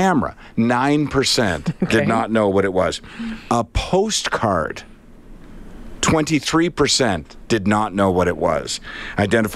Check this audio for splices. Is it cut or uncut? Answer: uncut